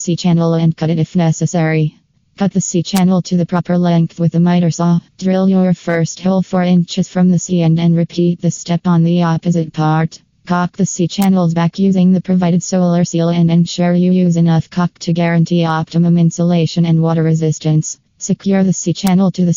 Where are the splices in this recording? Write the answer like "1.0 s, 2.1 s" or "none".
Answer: 5.1 s, 10.3 s